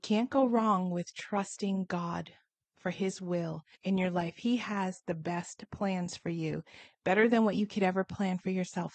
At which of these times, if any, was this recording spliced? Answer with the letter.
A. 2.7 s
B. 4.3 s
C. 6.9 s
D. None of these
D